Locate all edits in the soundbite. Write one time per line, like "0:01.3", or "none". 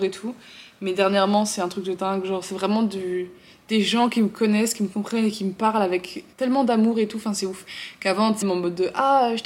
0:06.3
0:08.4